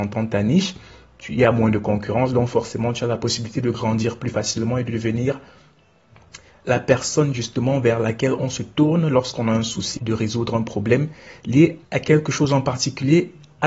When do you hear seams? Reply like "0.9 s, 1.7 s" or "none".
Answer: 10.0 s, 11.8 s